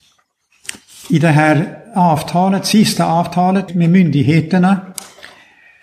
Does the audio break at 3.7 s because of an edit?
yes; 1 cut; at 3.7 s

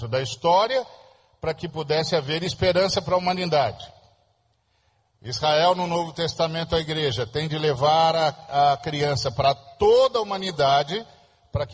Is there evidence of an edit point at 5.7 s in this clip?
no; 0 cuts

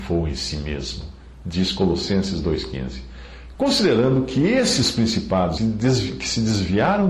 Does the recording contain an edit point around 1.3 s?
no; 2 cuts; at 3.5 s, 5.6 s

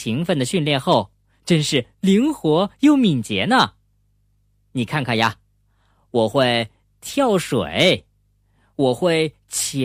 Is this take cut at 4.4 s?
no; 0 cuts

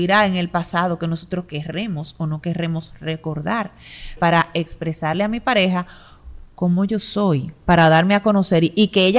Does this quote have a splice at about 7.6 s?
no; 1 cut; at 4.2 s

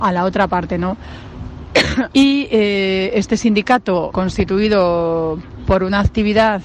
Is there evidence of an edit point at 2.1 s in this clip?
yes; 2 cuts; at 2.1 s, 4.1 s

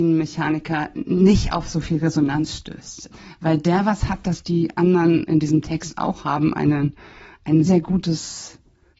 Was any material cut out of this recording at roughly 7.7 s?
yes; 1 cut; at 7.7 s

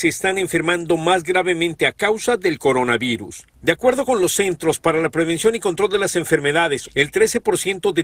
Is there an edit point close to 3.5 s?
yes; 2 cuts; at 3.5 s, 6.9 s

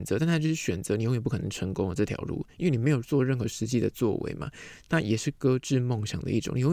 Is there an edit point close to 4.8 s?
no; 0 cuts

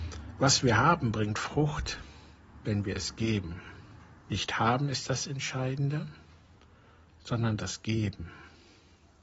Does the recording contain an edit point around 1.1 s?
no; 1 cut; at 4.2 s

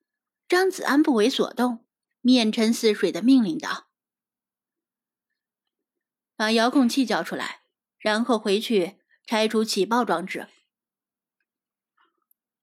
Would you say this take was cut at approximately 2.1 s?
yes; 1 cut; at 2.1 s

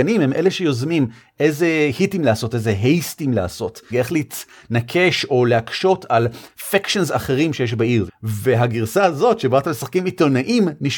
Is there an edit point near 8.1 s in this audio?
yes; 2 cuts; at 3.9 s, 8.1 s

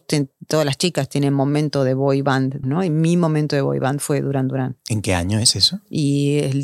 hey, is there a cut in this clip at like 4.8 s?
yes; 2 cuts; at 2.6 s, 4.8 s

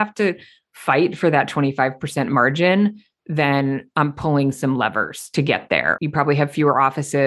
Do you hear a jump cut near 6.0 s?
yes; 1 cut; at 6.0 s

